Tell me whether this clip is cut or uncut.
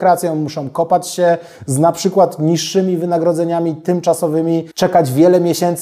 cut